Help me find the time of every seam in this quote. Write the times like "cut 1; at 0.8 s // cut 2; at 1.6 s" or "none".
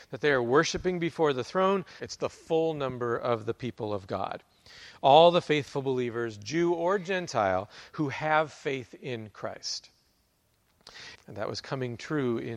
cut 1; at 2.0 s // cut 2; at 11.1 s